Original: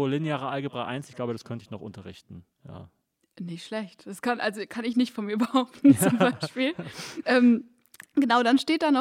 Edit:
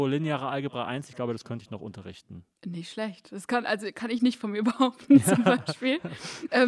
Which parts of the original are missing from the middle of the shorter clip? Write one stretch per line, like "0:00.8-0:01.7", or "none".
0:02.5-0:03.3